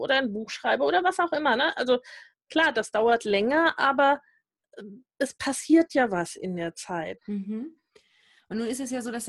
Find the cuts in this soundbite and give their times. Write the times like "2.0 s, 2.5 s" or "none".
7.2 s